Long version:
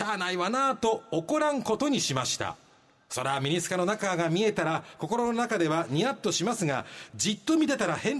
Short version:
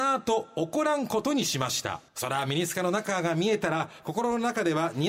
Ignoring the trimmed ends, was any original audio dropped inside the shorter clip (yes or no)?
yes